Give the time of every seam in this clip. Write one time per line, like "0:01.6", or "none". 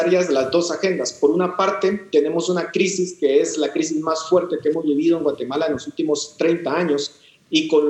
none

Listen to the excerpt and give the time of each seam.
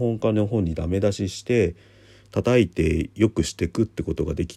none

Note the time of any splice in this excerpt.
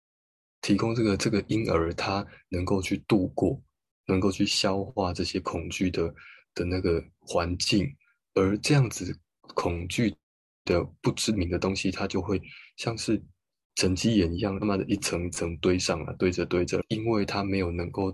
0:14.6
0:16.8

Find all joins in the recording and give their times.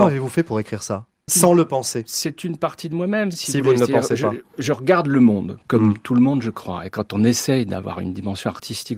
none

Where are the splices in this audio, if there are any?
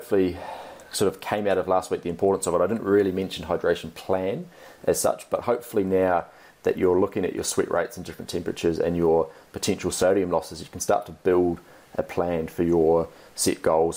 none

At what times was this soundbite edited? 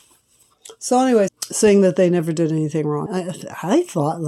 0:01.3
0:03.1

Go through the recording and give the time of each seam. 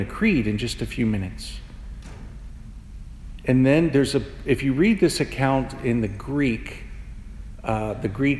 none

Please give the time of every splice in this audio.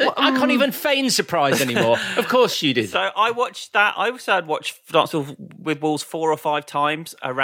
none

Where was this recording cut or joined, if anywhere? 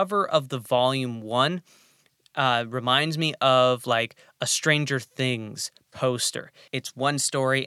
0:06.7

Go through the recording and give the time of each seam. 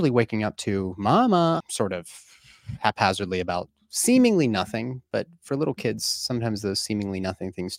0:01.6

